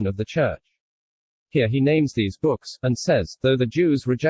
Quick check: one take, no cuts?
no; 1 cut; at 1.3 s

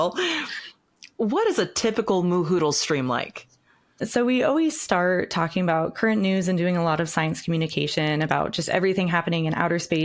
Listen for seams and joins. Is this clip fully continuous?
yes; 0 cuts

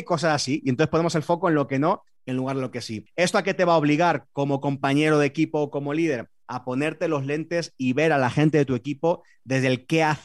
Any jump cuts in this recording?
no; 0 cuts

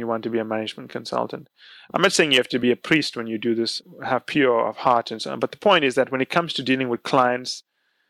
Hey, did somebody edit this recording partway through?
no; 0 cuts

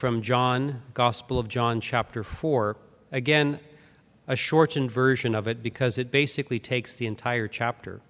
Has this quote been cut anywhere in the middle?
no; 0 cuts

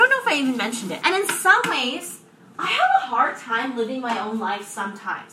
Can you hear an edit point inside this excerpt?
yes; 1 cut; at 1.0 s

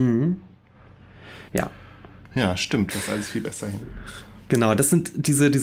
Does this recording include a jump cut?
yes; 2 cuts; at 1.5 s, 2.9 s

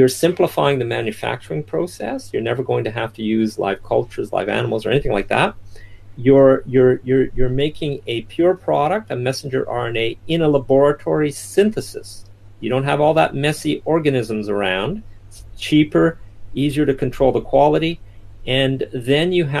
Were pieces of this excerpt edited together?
no; 0 cuts

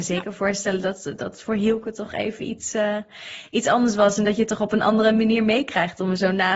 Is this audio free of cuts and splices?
yes; 0 cuts

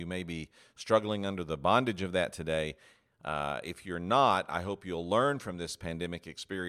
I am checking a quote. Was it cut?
no; 0 cuts

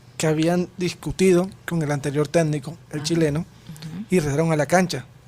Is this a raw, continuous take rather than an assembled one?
yes; 0 cuts

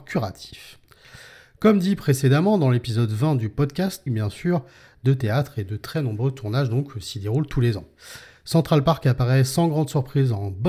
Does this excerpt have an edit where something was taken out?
yes; 1 cut; at 4.1 s

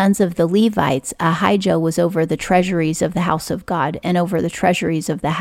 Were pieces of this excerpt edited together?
no; 0 cuts

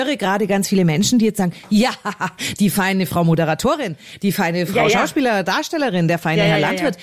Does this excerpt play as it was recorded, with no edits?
yes; 0 cuts

